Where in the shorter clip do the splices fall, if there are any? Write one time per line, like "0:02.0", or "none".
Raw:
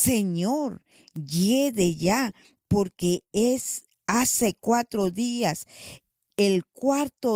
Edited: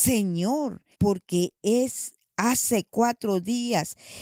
0:00.9